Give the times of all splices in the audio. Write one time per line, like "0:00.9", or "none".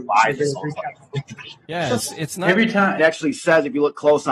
0:01.6
0:03.0